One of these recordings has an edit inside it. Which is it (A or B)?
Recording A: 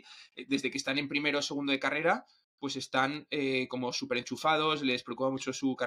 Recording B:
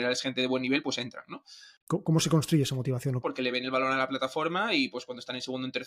B